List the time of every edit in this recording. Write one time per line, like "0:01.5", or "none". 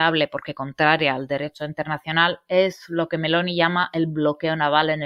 none